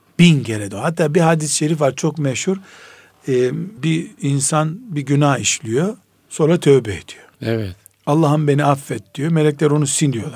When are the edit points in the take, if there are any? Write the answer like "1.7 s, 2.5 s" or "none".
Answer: 3.8 s